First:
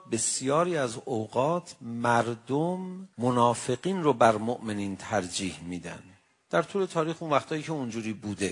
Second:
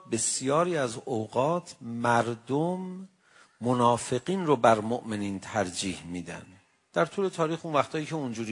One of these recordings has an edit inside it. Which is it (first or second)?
first